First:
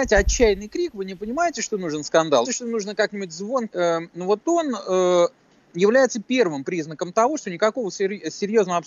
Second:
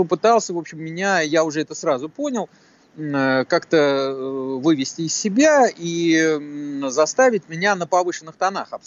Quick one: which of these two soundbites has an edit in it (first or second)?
first